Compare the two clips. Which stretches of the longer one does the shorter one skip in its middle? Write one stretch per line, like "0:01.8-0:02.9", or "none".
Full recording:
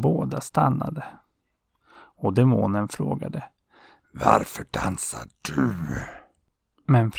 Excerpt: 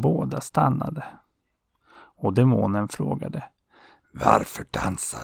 none